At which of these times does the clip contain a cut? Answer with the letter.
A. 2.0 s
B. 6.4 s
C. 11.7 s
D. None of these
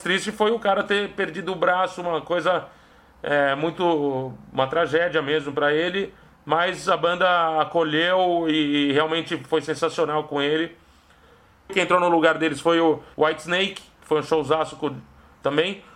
C